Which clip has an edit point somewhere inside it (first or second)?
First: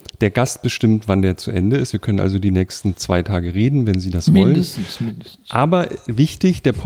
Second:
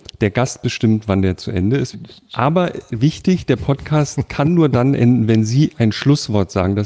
second